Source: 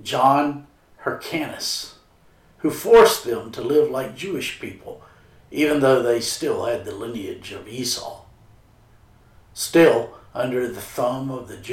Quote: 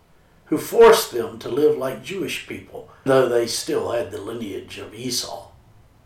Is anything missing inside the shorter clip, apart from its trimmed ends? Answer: yes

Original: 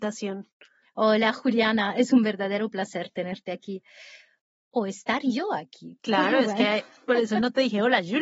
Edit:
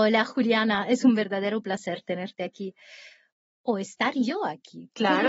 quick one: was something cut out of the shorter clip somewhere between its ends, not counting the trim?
no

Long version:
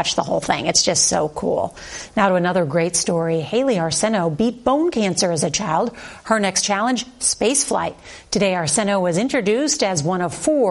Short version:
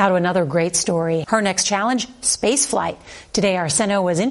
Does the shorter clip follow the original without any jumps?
no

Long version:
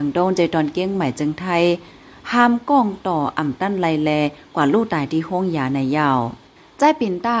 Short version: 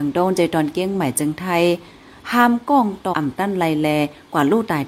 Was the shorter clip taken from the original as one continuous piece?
no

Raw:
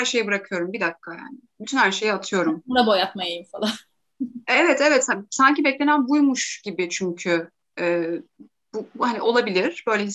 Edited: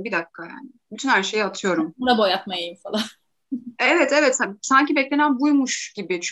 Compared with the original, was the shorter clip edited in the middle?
no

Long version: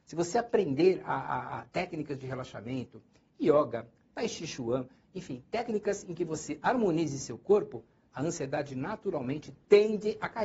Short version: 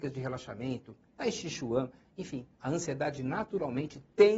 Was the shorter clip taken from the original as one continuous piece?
no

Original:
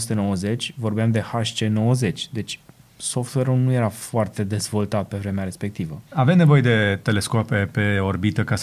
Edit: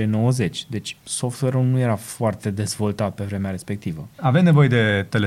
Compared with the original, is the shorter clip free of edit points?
no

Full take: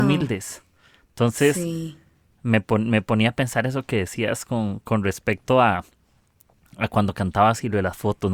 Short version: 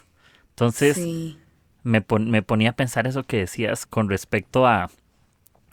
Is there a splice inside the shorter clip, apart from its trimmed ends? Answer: yes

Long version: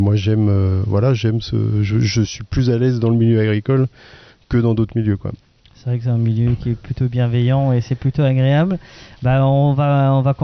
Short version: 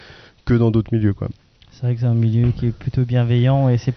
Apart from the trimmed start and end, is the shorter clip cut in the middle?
no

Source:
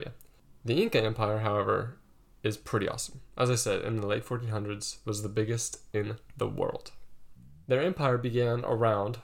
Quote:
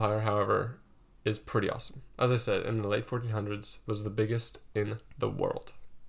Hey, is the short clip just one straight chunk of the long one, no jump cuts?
yes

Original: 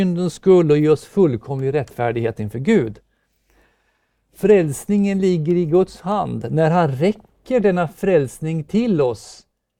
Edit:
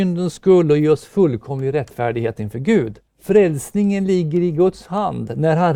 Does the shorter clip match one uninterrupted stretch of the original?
no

